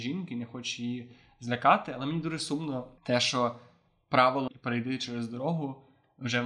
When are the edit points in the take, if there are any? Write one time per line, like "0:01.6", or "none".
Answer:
0:03.0
0:04.5